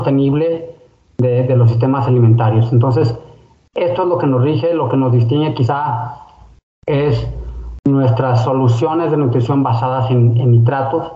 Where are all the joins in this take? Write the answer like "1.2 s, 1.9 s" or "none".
none